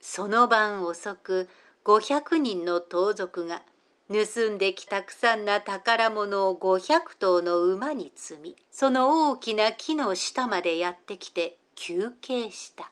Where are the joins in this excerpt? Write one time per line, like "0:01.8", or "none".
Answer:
0:04.9
0:08.7